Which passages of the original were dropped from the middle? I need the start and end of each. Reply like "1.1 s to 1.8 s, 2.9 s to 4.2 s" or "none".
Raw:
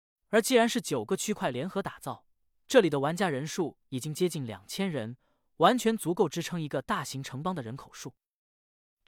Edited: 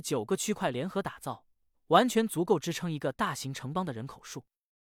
2.5 s to 5.4 s

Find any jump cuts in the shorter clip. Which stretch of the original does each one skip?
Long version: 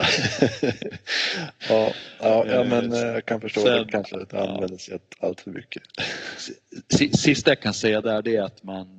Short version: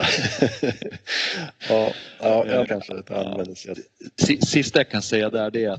2.6 s to 3.9 s, 5.0 s to 6.5 s

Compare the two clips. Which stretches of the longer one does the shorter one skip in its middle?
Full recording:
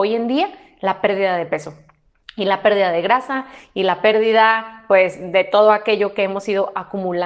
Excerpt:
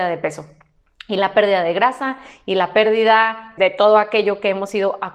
4.9 s to 5.3 s

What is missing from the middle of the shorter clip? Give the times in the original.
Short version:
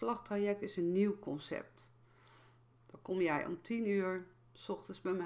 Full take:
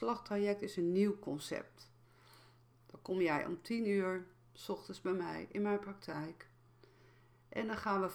none

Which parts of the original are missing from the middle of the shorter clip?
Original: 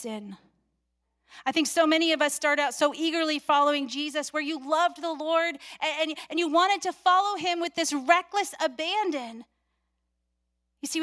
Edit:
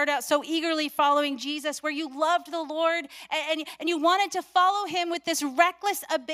none

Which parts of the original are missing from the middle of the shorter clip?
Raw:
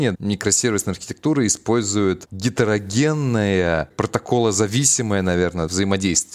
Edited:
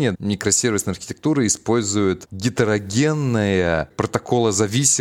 none

